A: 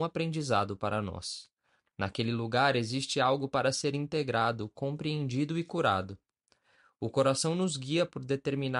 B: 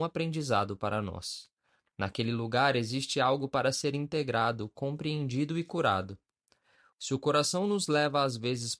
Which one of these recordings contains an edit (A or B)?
B